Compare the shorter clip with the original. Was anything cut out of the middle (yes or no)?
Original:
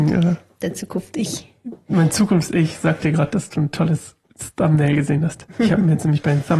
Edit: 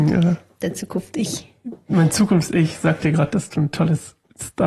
no